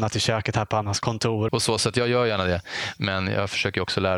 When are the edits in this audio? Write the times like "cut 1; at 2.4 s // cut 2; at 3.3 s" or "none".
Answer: cut 1; at 1.5 s